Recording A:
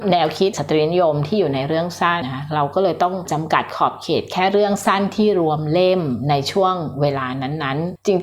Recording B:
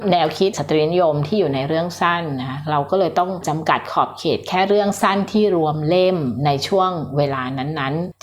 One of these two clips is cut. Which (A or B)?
A